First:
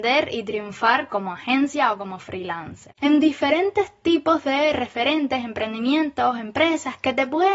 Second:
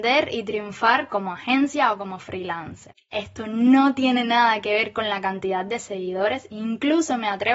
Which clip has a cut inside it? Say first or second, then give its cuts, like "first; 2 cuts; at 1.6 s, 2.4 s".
first; 1 cut; at 3.0 s